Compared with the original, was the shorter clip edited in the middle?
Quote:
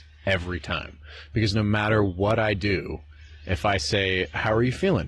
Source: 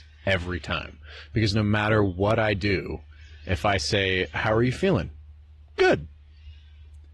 no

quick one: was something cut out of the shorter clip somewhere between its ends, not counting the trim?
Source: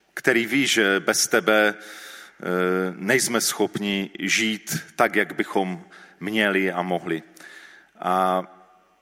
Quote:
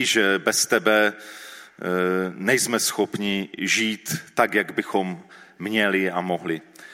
no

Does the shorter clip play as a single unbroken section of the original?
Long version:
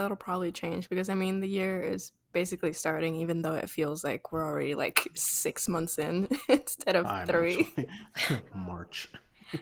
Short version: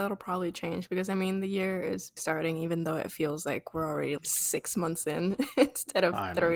no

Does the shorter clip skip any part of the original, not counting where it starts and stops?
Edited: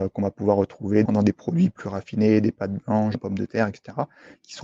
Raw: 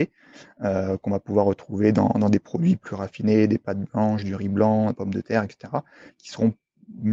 yes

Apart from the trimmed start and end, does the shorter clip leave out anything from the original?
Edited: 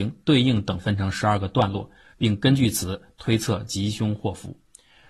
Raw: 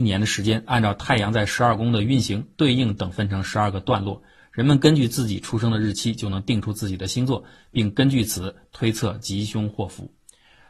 yes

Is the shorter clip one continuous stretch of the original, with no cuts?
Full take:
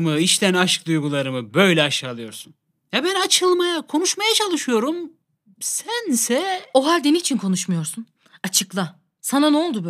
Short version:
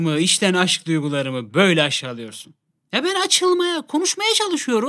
yes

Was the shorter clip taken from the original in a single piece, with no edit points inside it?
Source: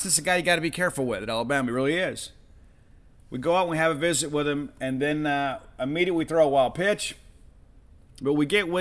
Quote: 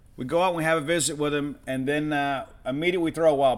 yes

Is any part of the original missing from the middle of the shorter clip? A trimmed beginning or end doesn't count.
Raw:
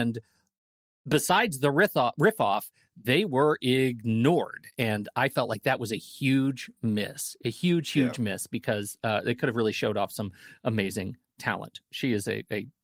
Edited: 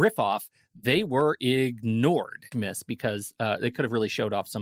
yes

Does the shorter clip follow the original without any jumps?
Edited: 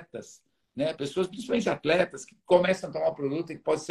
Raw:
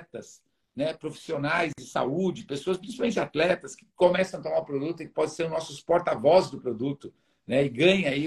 no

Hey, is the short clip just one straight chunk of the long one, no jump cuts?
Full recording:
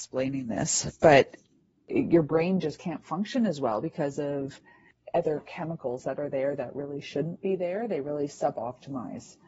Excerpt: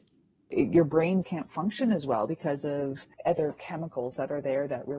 no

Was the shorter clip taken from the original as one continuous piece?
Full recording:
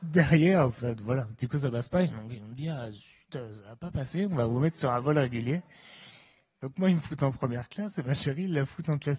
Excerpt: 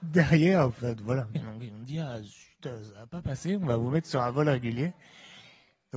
no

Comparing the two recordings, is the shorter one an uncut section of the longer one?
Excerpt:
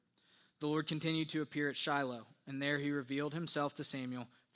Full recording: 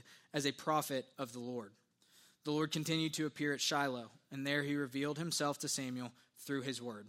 yes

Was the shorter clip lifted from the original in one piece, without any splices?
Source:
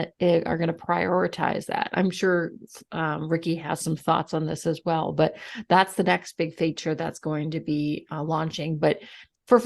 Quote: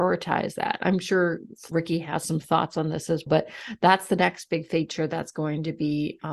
no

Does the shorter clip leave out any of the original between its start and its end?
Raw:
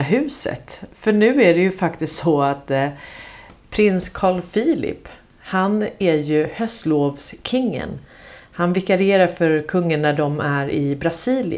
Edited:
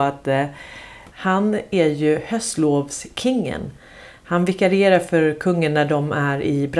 yes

